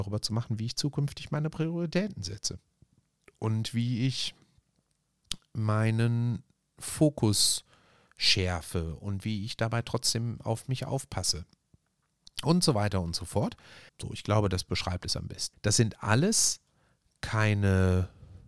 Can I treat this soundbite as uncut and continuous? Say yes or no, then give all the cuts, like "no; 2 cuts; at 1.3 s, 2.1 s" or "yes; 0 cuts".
no; 2 cuts; at 13.9 s, 15.5 s